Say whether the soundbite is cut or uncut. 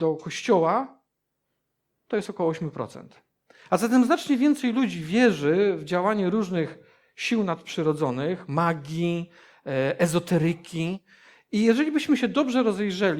uncut